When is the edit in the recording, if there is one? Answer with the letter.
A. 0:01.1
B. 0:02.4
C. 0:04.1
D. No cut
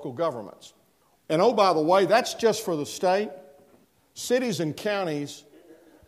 A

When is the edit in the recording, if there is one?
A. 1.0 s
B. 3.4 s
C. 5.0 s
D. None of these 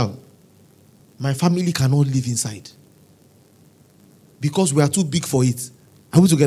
A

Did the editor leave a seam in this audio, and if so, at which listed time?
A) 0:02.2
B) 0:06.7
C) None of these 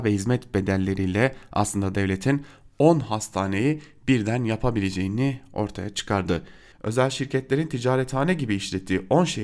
B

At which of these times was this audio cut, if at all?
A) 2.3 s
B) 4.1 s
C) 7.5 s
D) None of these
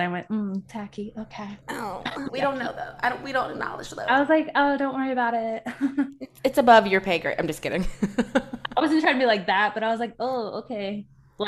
A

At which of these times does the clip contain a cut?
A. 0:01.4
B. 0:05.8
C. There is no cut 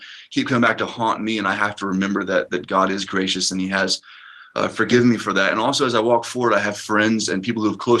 C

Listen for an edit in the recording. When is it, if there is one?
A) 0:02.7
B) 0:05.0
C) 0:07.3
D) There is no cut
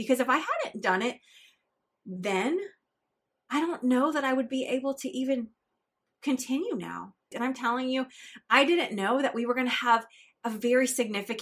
C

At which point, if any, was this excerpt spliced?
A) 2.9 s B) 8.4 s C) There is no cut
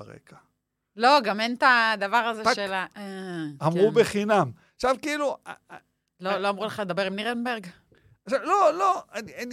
A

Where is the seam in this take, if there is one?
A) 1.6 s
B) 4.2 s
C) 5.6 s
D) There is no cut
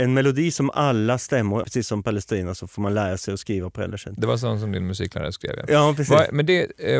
A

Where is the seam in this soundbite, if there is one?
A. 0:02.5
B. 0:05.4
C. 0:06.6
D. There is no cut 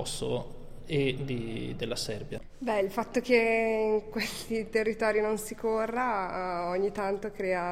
A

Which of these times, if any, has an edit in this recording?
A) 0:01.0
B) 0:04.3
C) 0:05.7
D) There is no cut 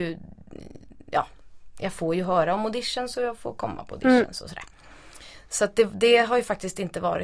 D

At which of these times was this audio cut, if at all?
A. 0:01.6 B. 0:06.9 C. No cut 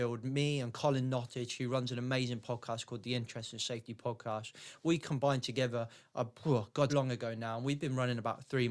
B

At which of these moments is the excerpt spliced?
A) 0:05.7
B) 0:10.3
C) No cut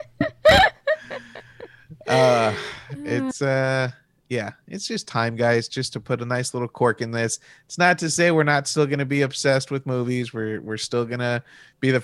C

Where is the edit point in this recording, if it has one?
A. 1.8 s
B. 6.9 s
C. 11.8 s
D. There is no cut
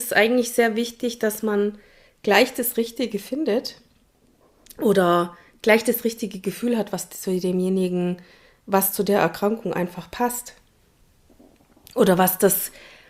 D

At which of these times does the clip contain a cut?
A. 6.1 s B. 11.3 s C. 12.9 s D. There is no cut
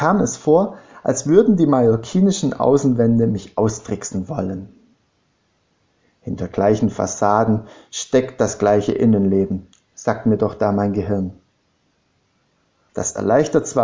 C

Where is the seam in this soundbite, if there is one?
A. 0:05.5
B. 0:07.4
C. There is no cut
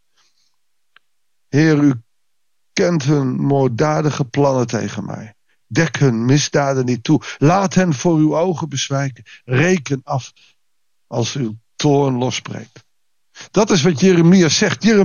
B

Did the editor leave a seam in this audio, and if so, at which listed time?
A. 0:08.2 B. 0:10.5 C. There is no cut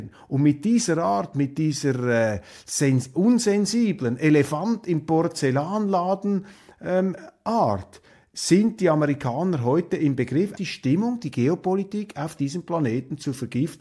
B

